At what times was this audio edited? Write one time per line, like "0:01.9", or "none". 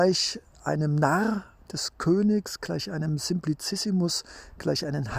none